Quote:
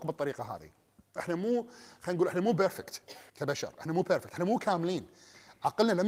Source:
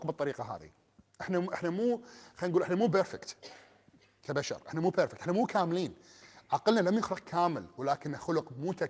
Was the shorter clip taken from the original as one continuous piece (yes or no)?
no